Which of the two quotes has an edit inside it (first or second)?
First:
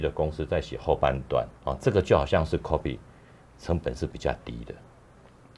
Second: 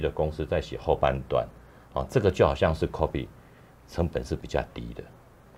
first